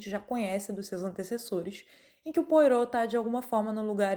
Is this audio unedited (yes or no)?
yes